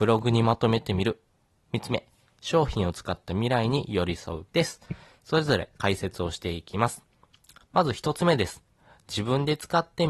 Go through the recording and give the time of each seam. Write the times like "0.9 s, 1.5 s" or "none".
4.5 s